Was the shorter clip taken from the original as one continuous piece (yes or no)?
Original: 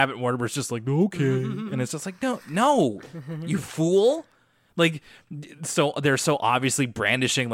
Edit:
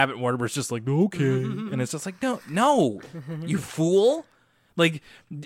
yes